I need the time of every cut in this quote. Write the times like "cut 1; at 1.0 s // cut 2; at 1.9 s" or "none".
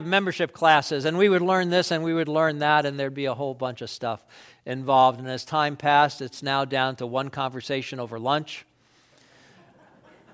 none

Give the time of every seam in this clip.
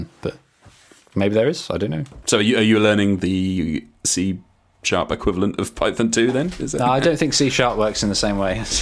cut 1; at 2.2 s

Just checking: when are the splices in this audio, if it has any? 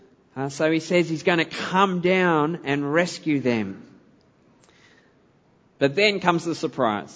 none

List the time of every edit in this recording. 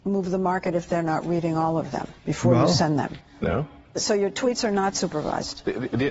cut 1; at 2.2 s // cut 2; at 3.3 s

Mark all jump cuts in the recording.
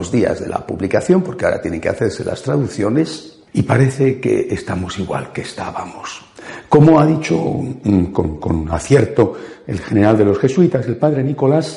cut 1; at 3.5 s

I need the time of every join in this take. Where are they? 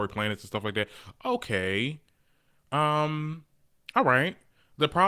none

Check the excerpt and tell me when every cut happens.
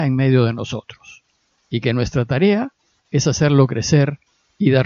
none

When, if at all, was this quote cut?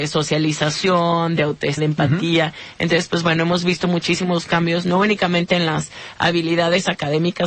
cut 1; at 1.8 s

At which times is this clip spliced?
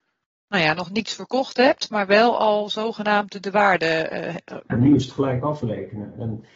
cut 1; at 4.7 s

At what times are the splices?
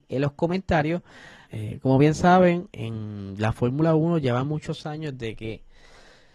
cut 1; at 1.4 s // cut 2; at 2.7 s

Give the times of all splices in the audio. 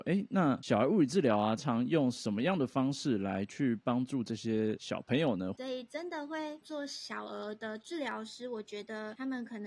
cut 1; at 1.6 s // cut 2; at 5.6 s

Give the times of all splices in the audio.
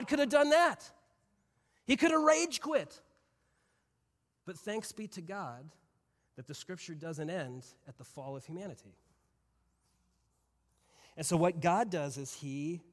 none

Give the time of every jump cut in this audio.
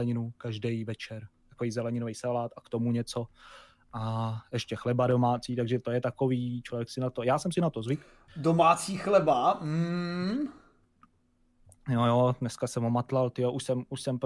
none

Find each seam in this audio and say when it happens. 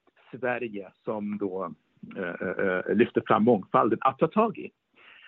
none

